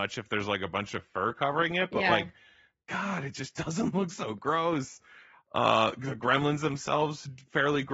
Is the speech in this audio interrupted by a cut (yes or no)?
no